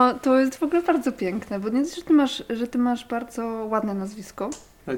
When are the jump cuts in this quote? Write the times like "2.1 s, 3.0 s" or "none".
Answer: none